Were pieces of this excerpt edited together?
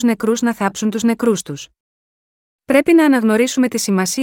no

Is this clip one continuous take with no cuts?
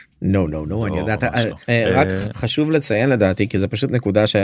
no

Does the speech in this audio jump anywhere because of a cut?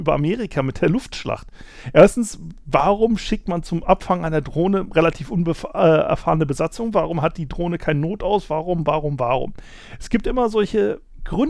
no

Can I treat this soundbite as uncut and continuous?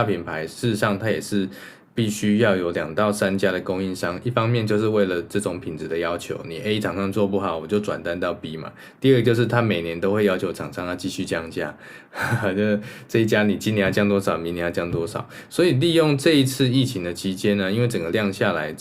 yes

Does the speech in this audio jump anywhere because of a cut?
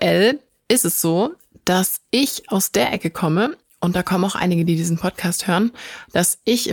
no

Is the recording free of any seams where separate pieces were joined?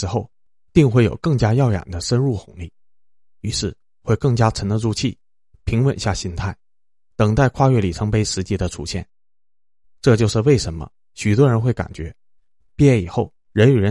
no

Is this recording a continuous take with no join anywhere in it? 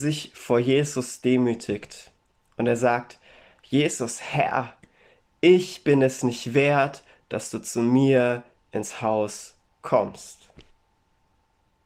yes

